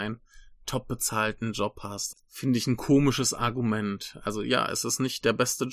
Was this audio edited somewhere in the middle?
yes; 1 cut; at 2.1 s

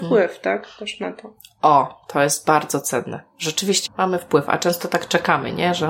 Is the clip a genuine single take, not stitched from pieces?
no; 1 cut; at 3.9 s

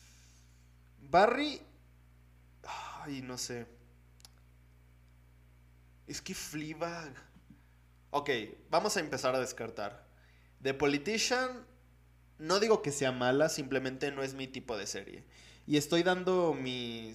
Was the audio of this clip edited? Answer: no; 0 cuts

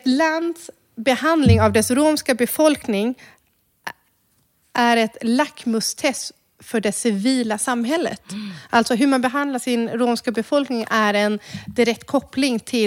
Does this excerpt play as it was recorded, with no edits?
yes; 0 cuts

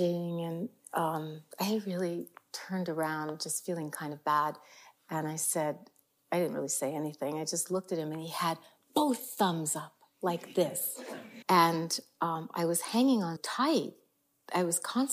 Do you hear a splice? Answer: yes; 2 cuts; at 11.4 s, 13.4 s

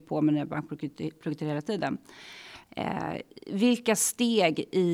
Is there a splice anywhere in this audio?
yes; 1 cut; at 2.7 s

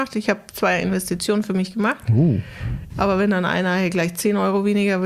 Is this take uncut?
no; 1 cut; at 2.9 s

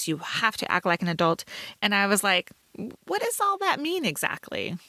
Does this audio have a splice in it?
yes; 2 cuts; at 1.8 s, 3.0 s

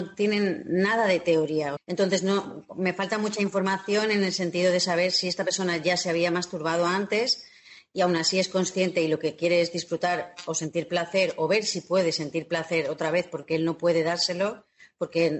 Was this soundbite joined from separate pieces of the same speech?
yes; 1 cut; at 1.8 s

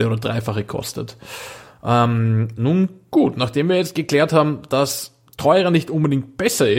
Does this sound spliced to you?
no; 0 cuts

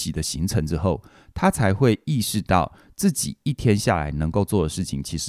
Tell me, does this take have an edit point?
no; 0 cuts

